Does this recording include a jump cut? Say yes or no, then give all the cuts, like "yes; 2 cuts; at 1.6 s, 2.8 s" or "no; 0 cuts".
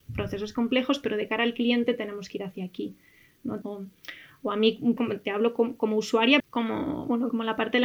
yes; 3 cuts; at 3.6 s, 5.0 s, 6.4 s